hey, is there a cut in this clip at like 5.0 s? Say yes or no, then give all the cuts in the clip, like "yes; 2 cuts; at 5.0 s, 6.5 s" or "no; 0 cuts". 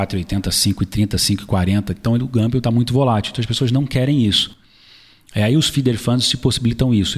no; 0 cuts